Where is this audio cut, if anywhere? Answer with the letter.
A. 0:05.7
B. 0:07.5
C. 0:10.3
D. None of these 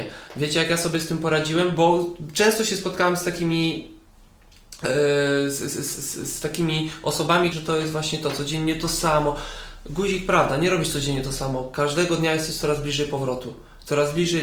B